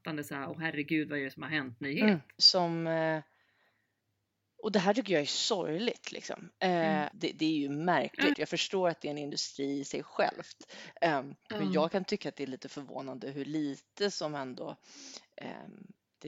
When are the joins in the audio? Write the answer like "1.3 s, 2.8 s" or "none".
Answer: 2.4 s, 7.1 s, 8.3 s